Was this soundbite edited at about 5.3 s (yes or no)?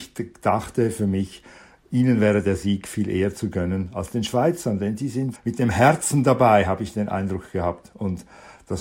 yes